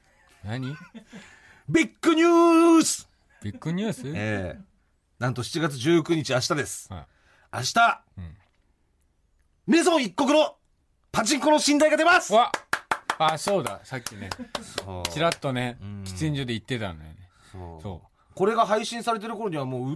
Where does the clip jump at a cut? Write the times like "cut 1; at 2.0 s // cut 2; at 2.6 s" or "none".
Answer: none